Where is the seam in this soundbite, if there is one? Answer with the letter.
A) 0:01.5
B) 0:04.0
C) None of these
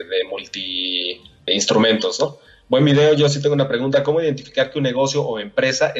A